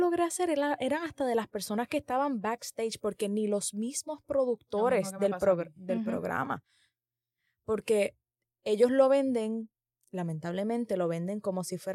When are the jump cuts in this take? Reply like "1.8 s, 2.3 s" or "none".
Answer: none